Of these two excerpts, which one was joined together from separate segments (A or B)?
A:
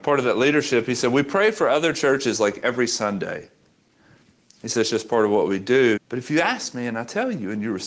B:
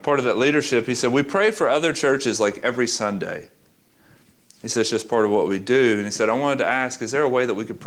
A